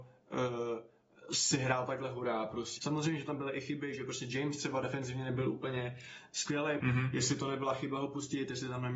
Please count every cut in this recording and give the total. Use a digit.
2